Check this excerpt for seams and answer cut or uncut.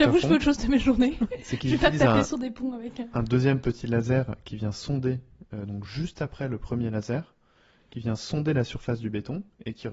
uncut